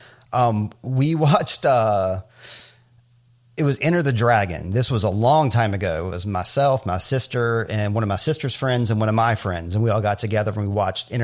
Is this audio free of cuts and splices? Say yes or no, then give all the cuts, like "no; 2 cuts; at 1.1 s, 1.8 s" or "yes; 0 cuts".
yes; 0 cuts